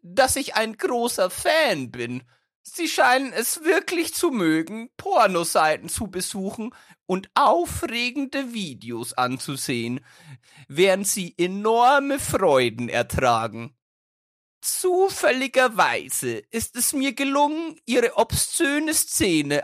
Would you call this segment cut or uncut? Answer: uncut